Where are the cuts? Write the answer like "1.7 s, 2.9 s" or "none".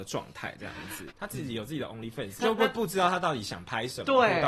1.1 s, 2.4 s